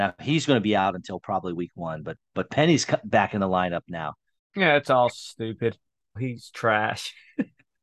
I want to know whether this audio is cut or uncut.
cut